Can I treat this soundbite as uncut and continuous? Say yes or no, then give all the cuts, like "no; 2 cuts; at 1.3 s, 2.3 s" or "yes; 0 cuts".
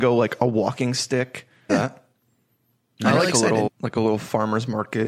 no; 2 cuts; at 1.7 s, 3.7 s